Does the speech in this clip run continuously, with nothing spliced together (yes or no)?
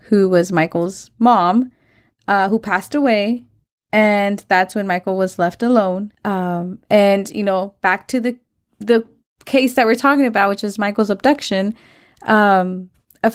yes